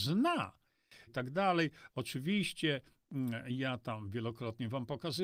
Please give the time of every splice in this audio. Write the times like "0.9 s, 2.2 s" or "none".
1.1 s